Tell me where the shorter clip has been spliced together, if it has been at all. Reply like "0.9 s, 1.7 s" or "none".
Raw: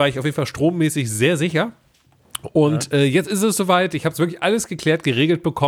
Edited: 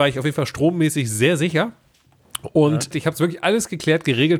2.9 s